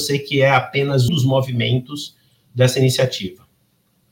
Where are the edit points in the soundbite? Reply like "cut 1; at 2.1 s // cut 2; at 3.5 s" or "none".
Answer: cut 1; at 1.1 s